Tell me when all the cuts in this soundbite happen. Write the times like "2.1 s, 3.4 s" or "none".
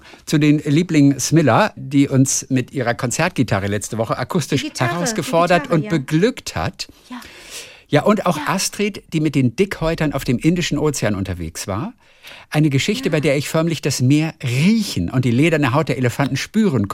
1.8 s

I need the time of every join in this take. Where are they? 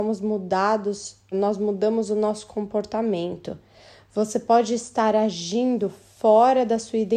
1.3 s

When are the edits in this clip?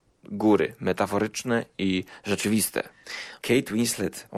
3.4 s

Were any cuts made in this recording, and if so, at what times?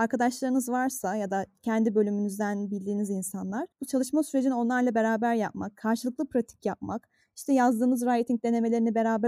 none

